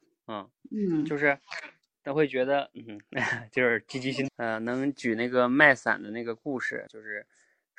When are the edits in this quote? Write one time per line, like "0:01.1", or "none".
0:04.3
0:06.9